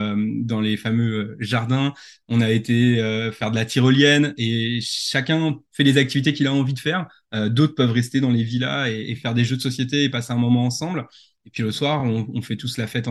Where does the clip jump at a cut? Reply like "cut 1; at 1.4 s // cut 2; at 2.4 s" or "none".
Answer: none